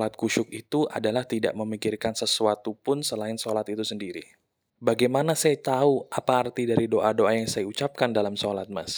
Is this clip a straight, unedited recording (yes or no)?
no